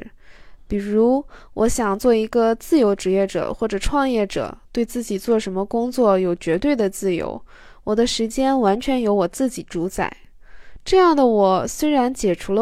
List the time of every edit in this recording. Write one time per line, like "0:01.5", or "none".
none